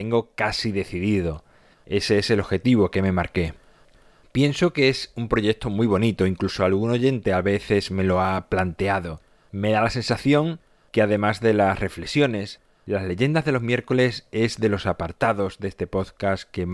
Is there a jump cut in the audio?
yes; 1 cut; at 1.7 s

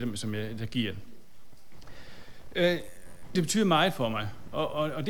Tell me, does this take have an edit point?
yes; 1 cut; at 3.4 s

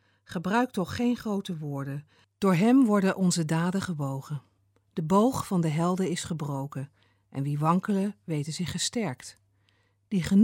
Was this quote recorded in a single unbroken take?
no; 1 cut; at 2.2 s

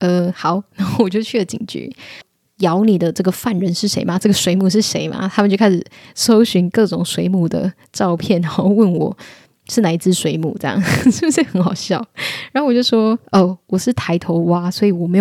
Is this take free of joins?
no; 1 cut; at 2.2 s

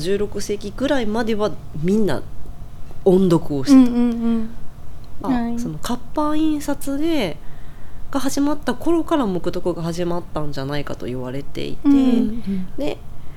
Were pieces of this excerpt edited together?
yes; 1 cut; at 5.2 s

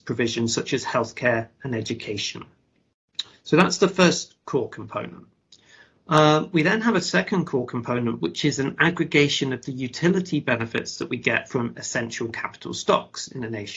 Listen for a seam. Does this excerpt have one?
no; 0 cuts

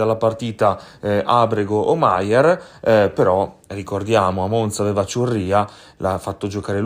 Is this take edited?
no; 0 cuts

